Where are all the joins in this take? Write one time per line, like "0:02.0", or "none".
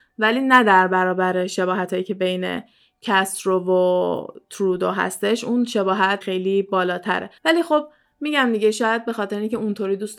0:06.2
0:07.4